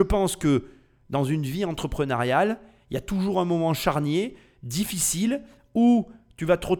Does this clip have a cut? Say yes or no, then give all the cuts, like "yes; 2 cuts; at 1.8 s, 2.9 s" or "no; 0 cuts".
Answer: no; 0 cuts